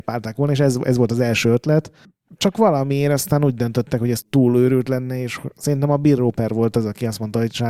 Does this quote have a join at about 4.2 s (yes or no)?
yes